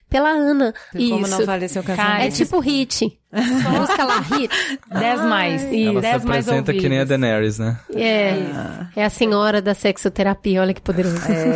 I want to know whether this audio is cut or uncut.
cut